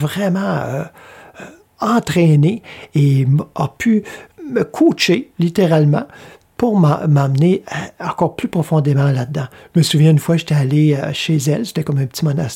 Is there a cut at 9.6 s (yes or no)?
no